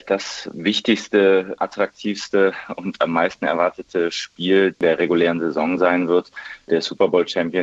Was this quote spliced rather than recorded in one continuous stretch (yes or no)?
no